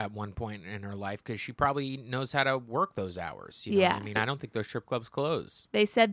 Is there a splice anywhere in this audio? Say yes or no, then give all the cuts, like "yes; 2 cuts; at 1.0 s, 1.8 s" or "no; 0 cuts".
yes; 1 cut; at 4.2 s